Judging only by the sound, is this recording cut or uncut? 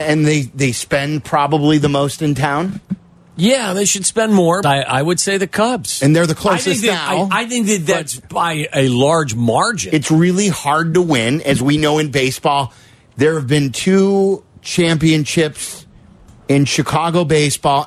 cut